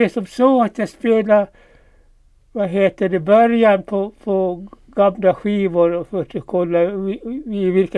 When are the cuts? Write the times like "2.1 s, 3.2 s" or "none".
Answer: none